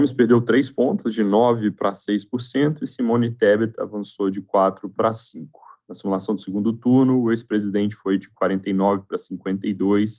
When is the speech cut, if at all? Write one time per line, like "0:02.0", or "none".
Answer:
none